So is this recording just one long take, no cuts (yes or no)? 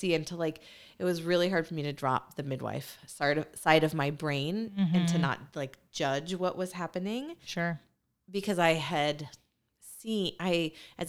yes